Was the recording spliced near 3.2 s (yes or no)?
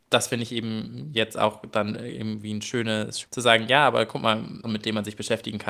yes